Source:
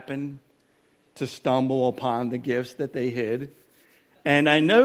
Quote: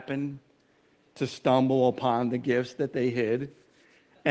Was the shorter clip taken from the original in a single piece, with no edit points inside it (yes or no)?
yes